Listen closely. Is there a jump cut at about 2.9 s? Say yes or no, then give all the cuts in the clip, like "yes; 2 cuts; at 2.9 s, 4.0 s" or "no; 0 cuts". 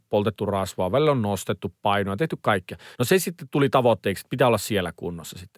yes; 1 cut; at 2.9 s